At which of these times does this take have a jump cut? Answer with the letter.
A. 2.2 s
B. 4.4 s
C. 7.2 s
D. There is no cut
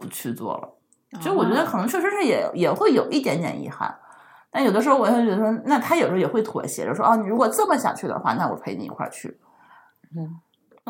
D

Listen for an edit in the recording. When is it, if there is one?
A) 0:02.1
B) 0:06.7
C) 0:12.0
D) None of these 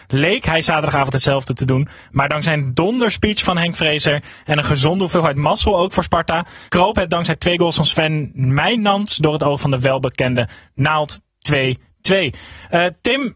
B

